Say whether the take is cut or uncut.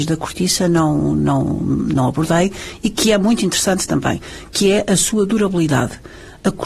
uncut